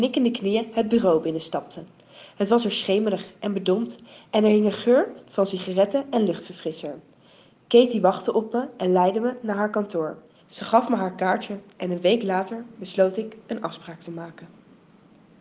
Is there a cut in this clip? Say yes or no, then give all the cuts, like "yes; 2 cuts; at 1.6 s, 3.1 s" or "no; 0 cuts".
yes; 1 cut; at 10.4 s